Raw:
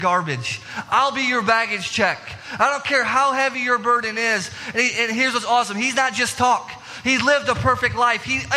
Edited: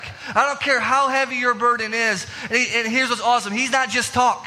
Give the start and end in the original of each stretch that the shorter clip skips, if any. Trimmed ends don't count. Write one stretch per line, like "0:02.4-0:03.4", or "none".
none